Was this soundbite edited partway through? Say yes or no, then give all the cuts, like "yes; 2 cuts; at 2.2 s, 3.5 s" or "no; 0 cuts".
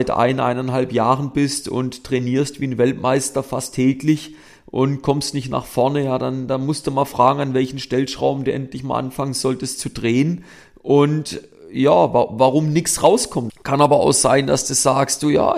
yes; 1 cut; at 13.5 s